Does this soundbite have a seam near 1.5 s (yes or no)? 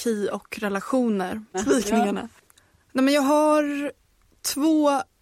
yes